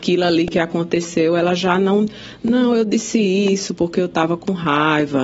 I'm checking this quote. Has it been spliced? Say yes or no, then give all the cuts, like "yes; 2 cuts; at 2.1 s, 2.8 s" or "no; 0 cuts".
no; 0 cuts